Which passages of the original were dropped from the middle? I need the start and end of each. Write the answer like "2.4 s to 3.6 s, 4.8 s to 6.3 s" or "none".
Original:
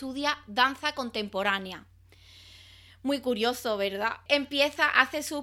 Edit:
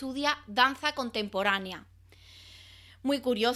none